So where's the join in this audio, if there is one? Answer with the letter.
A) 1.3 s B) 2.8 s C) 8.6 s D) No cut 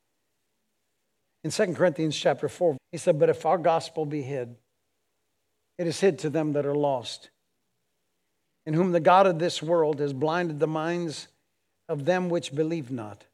B